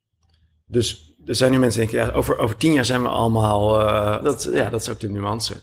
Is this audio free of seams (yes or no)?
no